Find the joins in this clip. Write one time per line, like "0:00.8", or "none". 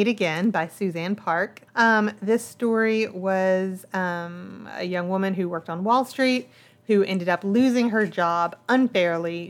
0:01.7